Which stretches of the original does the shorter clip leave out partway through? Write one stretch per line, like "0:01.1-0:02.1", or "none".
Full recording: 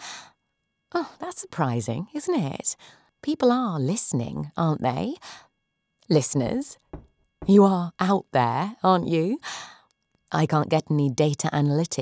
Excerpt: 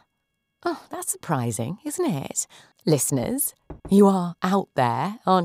0:03.0-0:06.0
0:07.0-0:07.4